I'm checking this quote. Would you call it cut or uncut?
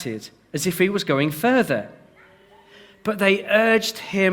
uncut